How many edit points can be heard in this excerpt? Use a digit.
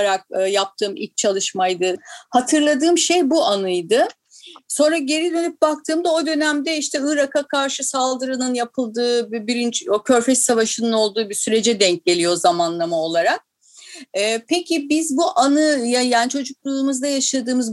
1